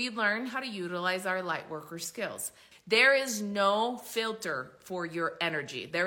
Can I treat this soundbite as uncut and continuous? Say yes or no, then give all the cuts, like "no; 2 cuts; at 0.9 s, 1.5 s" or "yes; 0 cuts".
no; 1 cut; at 2.7 s